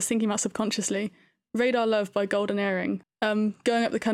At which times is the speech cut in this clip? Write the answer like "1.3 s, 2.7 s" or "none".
3.0 s